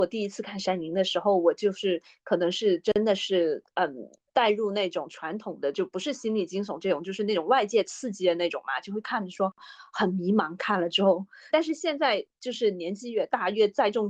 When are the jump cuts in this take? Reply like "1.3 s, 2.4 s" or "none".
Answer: 11.5 s